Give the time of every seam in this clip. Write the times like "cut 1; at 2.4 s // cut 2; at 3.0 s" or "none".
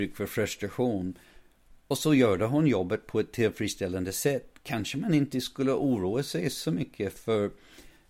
none